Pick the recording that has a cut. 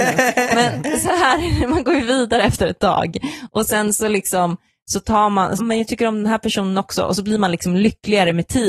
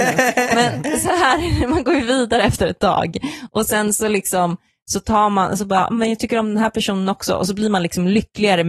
first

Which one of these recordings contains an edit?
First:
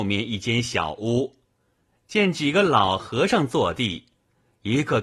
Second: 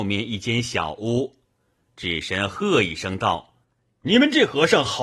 second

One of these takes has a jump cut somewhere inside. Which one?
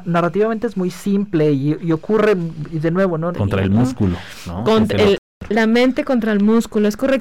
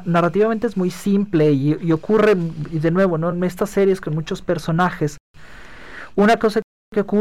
first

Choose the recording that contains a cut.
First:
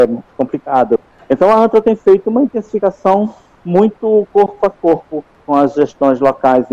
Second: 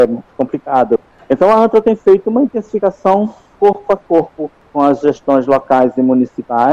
second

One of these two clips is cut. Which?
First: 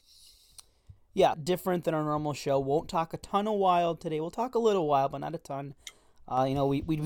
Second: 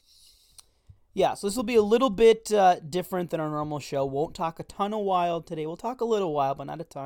first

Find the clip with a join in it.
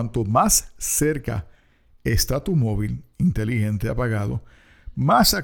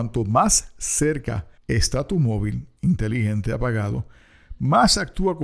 second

